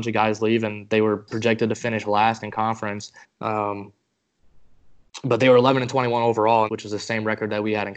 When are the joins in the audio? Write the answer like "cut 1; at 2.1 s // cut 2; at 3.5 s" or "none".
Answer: cut 1; at 3.2 s // cut 2; at 6.7 s